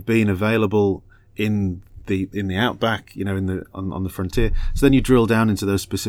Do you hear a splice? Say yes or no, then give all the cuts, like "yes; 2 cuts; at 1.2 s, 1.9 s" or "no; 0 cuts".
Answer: no; 0 cuts